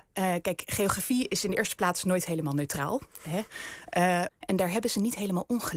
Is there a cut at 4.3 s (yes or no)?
yes